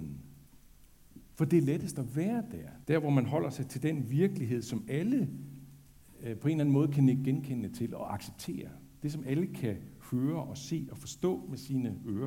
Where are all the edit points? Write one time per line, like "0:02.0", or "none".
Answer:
0:02.8